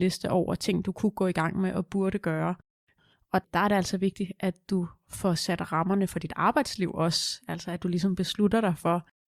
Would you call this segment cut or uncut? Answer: uncut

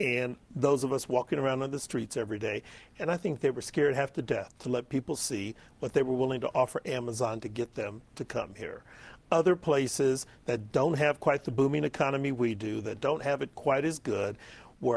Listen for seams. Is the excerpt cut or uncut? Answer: uncut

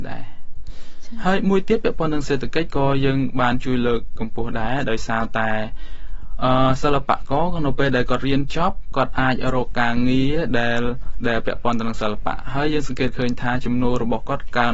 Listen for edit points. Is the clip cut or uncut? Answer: uncut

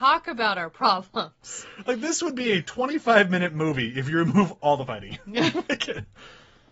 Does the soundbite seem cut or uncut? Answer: uncut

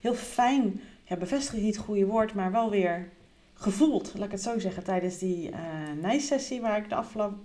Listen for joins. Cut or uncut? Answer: uncut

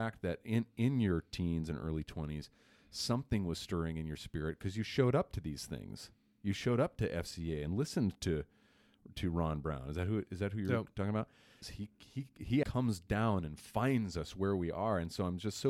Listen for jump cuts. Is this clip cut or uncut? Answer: cut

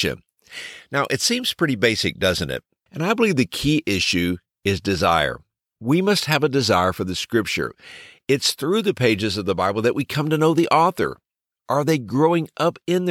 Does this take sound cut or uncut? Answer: cut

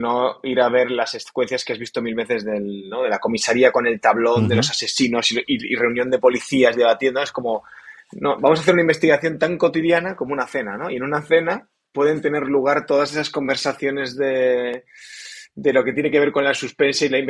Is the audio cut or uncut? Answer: uncut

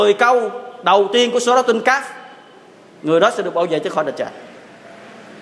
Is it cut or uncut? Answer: uncut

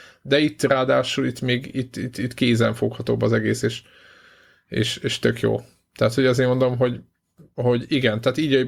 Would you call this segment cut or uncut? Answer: uncut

